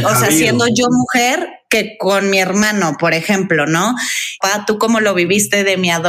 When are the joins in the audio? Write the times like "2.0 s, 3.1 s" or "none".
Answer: 4.4 s